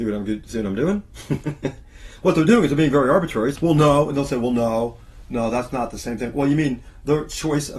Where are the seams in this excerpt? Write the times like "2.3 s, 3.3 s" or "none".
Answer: 3.6 s